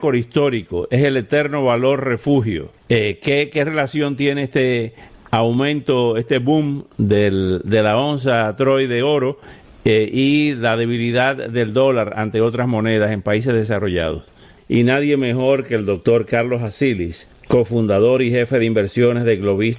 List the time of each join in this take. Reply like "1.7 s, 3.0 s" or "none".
14.6 s

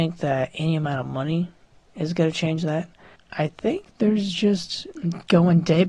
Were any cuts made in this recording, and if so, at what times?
3.1 s

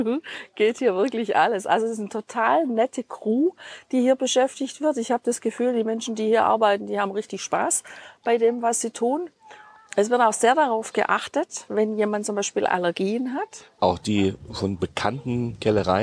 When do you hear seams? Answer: 13.8 s

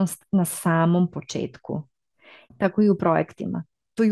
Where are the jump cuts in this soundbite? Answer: 2.4 s

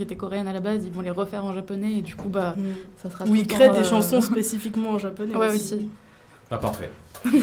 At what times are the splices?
none

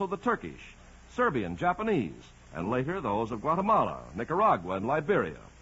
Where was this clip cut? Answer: none

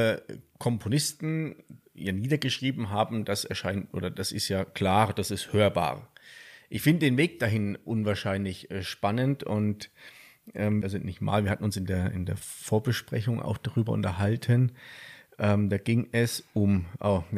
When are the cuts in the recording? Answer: 10.8 s

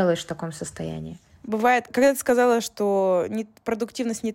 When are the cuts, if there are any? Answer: 1.9 s

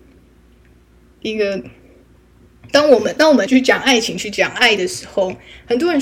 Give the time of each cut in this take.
3.5 s

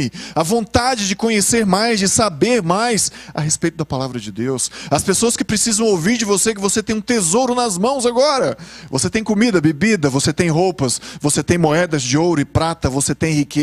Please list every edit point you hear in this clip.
none

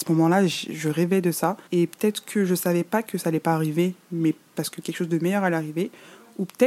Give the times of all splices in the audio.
1.7 s

